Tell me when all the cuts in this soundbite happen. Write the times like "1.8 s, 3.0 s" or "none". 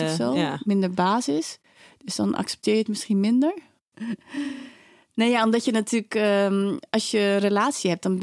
3.9 s